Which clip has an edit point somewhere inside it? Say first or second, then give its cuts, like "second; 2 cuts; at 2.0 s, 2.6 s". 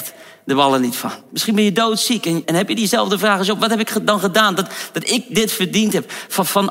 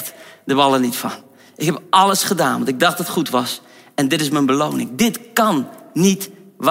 first; 2 cuts; at 1.3 s, 2.4 s